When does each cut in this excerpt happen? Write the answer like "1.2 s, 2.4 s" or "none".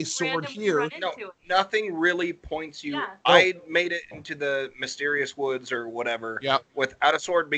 3.2 s